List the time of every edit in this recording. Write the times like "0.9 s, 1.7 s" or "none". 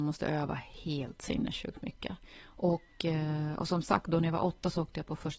none